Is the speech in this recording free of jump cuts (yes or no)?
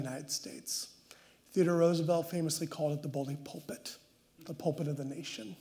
yes